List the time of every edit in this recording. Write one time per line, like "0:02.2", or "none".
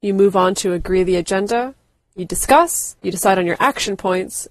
0:03.0